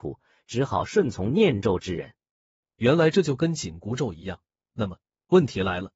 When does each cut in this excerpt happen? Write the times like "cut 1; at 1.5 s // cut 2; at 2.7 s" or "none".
none